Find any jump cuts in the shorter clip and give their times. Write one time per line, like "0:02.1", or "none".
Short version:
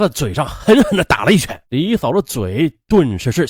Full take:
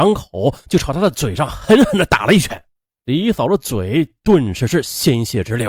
0:01.6